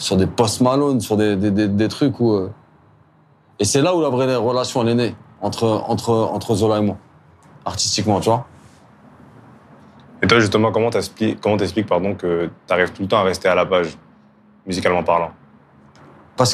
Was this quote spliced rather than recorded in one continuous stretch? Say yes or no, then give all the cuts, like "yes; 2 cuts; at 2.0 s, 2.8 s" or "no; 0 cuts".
no; 0 cuts